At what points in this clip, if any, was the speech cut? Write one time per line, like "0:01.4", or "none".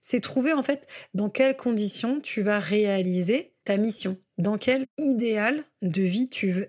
none